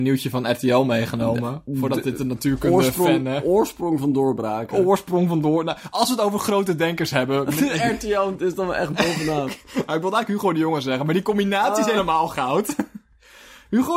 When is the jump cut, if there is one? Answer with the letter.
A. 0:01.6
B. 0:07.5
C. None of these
C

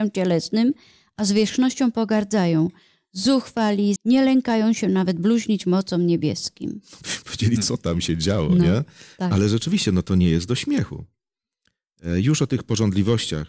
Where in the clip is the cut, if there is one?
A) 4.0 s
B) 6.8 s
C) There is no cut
A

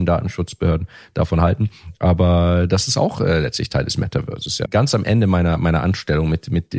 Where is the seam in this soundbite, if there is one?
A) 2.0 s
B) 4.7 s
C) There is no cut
B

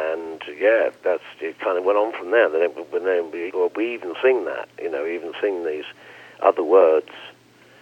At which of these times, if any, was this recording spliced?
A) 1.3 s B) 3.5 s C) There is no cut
B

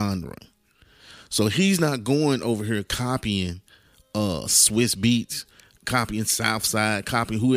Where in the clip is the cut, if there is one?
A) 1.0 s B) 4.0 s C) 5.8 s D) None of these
C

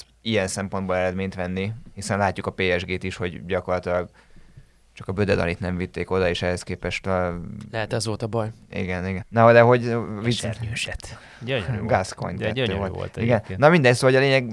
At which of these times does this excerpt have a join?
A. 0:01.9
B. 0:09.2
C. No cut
B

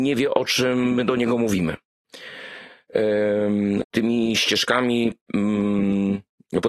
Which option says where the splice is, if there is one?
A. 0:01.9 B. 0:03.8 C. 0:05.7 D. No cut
B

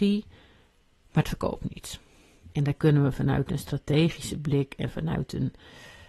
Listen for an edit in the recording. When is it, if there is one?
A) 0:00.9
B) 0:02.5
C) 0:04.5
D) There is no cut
B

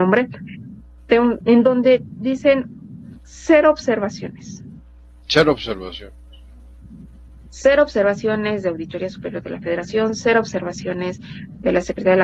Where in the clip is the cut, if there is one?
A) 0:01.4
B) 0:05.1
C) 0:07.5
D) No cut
A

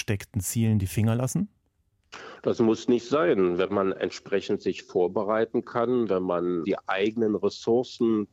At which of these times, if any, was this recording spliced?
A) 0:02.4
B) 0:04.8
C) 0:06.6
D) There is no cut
C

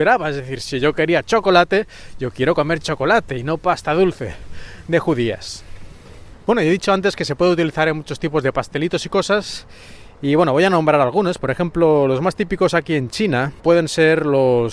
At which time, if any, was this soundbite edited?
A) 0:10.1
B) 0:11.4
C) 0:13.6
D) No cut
C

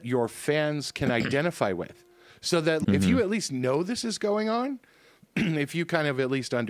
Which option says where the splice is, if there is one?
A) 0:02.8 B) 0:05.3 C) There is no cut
A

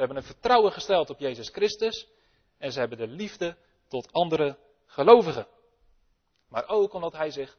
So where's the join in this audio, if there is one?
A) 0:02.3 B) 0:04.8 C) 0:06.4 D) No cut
C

